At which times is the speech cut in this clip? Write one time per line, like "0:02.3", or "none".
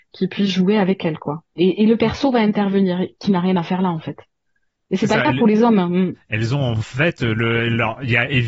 none